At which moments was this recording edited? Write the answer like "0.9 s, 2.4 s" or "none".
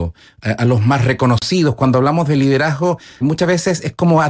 3.2 s